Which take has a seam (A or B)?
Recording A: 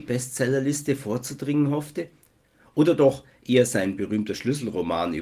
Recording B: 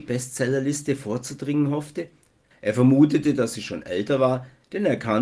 B